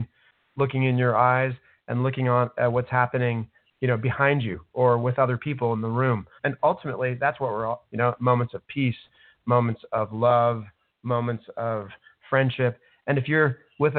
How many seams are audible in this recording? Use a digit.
2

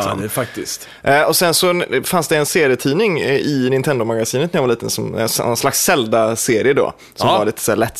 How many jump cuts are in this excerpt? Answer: 0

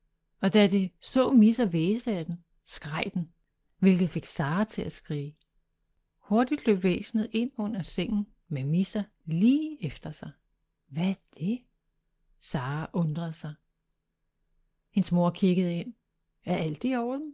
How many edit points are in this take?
1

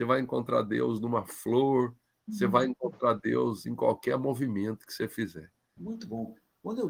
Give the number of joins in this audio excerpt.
1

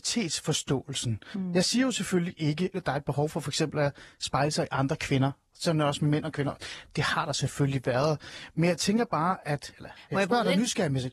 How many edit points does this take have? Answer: 1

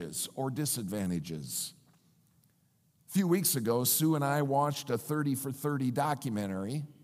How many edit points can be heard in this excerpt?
0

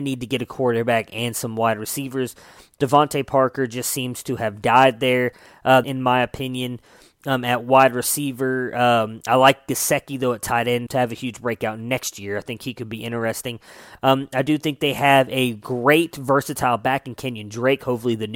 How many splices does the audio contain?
2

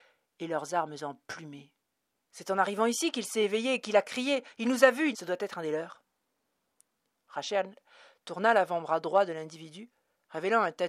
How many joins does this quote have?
2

